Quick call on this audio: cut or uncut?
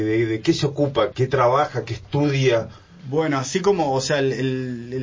cut